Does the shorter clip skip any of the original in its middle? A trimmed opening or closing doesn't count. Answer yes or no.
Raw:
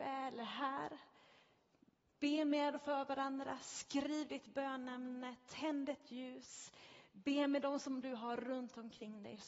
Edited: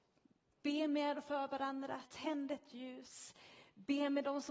yes